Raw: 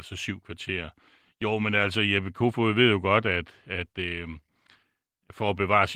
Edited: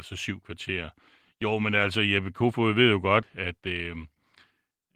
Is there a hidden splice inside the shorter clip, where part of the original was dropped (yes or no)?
yes